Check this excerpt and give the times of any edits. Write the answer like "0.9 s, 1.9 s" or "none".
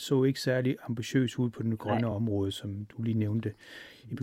none

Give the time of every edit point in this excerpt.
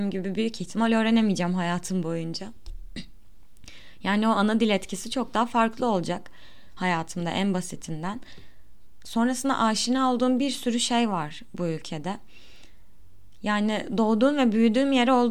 none

